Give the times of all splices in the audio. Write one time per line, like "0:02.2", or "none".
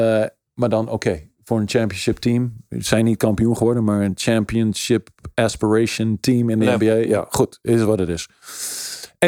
none